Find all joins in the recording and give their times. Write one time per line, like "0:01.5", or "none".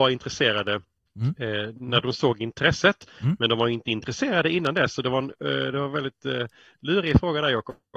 none